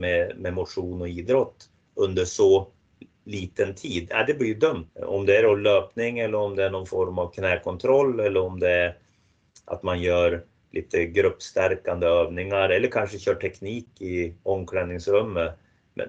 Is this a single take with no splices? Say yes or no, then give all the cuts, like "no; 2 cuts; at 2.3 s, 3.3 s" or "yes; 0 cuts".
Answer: no; 1 cut; at 4.9 s